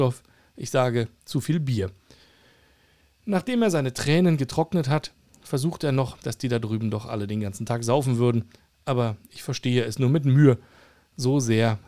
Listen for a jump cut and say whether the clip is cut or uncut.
cut